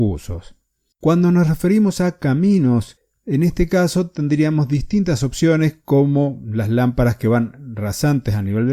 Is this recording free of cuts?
no; 1 cut; at 0.9 s

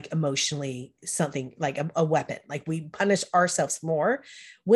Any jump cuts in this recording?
no; 0 cuts

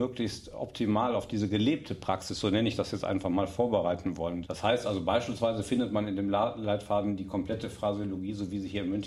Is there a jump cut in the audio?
yes; 1 cut; at 4.4 s

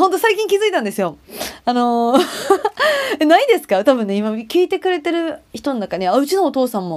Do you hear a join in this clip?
no; 0 cuts

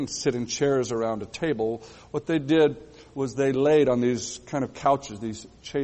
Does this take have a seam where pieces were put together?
no; 0 cuts

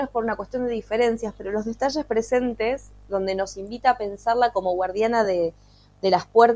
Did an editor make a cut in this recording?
no; 0 cuts

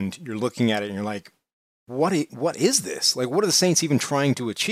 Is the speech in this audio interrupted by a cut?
no; 0 cuts

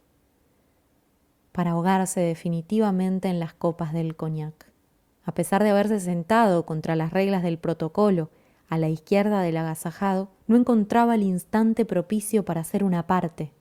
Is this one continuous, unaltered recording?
no; 2 cuts; at 5.1 s, 10.4 s

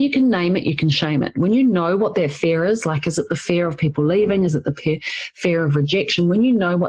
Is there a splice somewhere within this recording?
no; 0 cuts

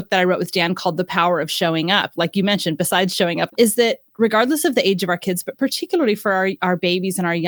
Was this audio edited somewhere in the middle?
yes; 1 cut; at 3.5 s

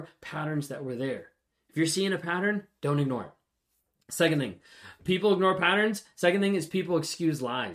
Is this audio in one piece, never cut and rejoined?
yes; 0 cuts

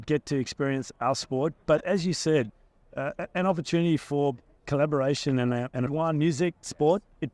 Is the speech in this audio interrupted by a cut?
yes; 2 cuts; at 4.6 s, 5.9 s

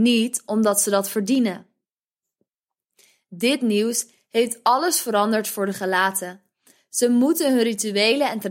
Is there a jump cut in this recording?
no; 0 cuts

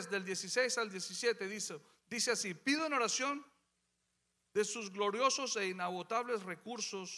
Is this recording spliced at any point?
no; 0 cuts

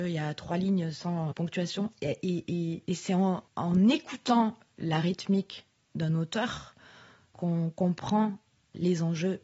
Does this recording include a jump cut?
yes; 1 cut; at 1.3 s

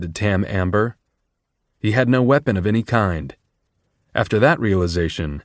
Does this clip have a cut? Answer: yes; 1 cut; at 1.6 s

